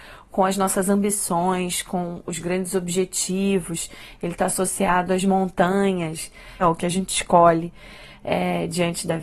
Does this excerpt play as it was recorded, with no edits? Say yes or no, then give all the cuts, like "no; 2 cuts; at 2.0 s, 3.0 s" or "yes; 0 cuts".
no; 1 cut; at 6.6 s